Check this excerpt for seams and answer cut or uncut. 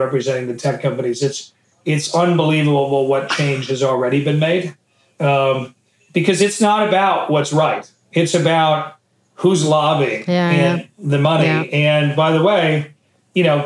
uncut